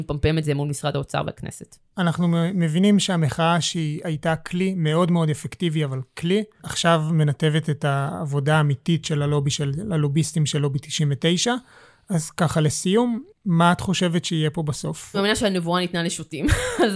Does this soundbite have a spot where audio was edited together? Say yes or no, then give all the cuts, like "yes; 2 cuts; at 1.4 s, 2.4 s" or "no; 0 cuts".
no; 0 cuts